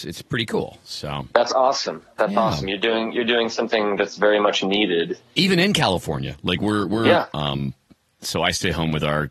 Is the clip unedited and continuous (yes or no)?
no